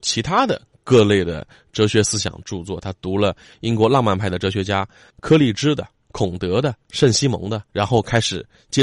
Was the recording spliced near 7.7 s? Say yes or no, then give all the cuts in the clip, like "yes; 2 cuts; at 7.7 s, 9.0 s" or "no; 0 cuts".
yes; 1 cut; at 7.7 s